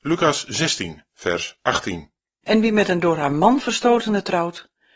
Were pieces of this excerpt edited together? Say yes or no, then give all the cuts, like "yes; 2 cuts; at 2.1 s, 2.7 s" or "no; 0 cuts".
yes; 1 cut; at 2.4 s